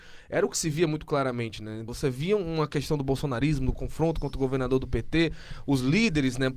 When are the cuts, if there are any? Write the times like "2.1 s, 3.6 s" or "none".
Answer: 1.9 s